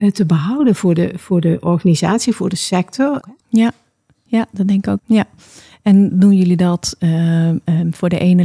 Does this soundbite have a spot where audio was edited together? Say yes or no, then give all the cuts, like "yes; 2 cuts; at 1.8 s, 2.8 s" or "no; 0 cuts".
yes; 2 cuts; at 3.2 s, 5.0 s